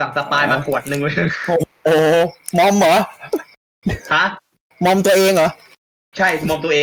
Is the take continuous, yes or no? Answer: yes